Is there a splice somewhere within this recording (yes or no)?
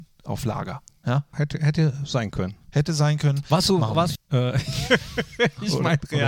yes